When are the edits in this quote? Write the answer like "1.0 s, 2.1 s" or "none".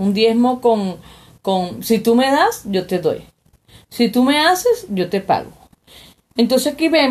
none